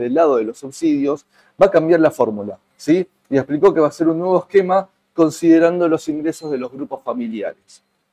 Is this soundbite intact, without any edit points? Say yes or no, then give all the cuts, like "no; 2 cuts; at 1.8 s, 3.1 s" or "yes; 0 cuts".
yes; 0 cuts